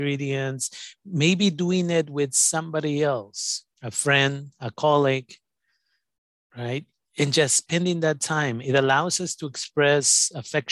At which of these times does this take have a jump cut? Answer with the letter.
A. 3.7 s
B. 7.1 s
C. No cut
A